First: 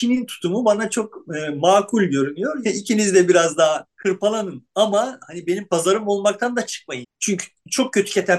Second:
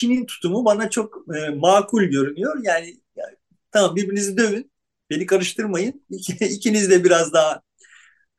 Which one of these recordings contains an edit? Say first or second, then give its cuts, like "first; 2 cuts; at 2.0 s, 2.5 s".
first; 3 cuts; at 2.6 s, 3.9 s, 7.0 s